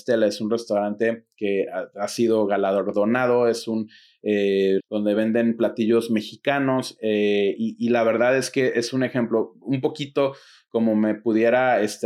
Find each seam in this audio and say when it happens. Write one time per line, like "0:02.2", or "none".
0:04.8